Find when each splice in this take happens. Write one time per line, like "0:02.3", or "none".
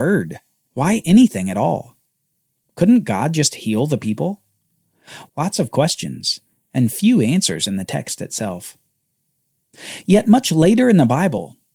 0:05.3